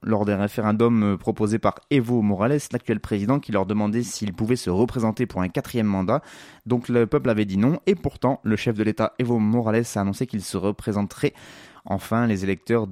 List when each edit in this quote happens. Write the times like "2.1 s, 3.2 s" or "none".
11.7 s